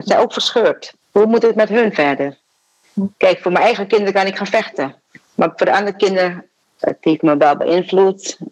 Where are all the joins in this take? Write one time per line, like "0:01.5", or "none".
0:01.0
0:06.8